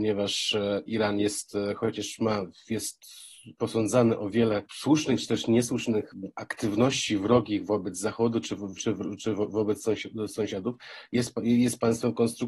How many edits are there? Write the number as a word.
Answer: one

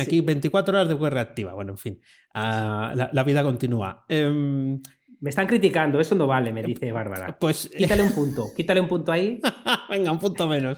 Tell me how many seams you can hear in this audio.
zero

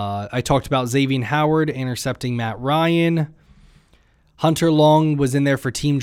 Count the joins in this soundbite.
zero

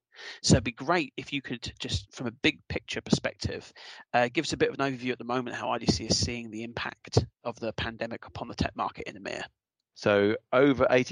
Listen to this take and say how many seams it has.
one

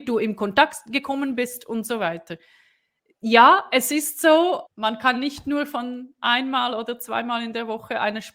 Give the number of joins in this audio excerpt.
one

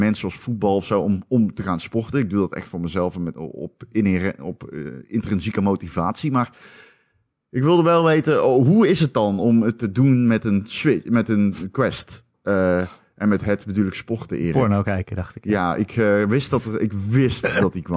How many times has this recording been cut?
zero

